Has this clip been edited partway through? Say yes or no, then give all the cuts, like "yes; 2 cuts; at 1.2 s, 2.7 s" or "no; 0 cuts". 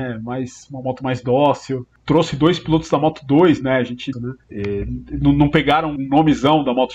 yes; 2 cuts; at 4.1 s, 6.0 s